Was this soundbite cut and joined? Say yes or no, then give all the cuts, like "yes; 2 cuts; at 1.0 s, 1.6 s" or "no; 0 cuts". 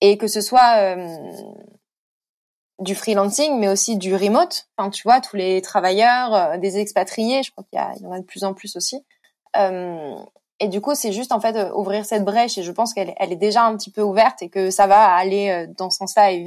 no; 0 cuts